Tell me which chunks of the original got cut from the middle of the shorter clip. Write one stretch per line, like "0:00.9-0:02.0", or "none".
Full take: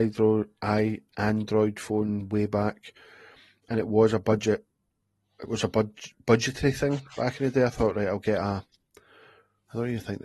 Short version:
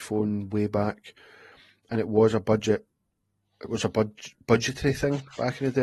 none